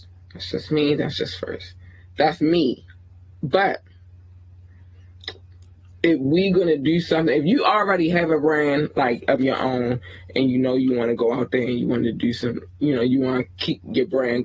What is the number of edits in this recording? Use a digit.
0